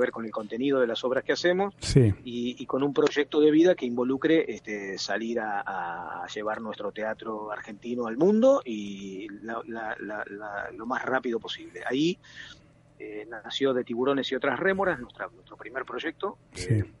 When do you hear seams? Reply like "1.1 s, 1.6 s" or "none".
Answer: none